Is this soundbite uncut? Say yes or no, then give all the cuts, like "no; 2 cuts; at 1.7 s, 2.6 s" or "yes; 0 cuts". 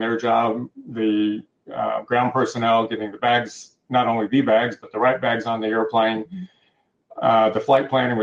yes; 0 cuts